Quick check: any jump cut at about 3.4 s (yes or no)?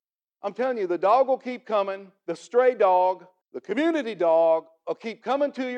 yes